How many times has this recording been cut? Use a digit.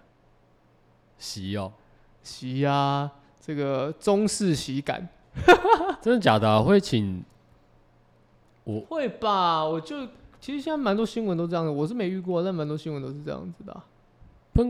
0